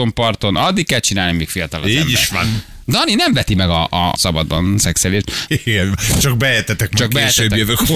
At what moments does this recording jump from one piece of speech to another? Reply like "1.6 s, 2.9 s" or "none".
4.2 s, 5.5 s